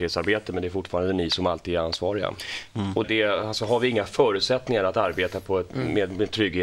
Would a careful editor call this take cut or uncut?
cut